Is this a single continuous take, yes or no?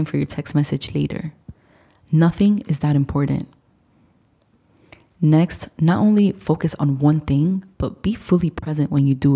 yes